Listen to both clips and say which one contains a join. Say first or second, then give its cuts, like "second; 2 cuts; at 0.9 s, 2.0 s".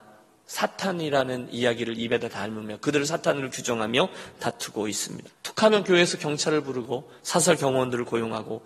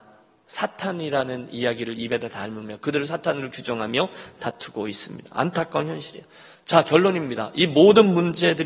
first; 1 cut; at 5.3 s